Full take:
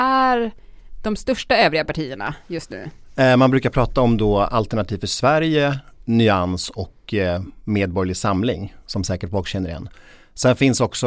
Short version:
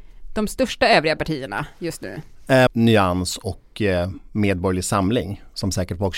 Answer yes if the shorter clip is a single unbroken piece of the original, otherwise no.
no